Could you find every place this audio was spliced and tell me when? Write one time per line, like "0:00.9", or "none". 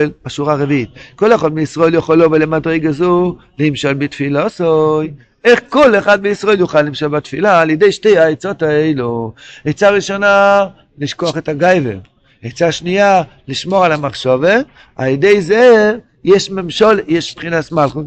none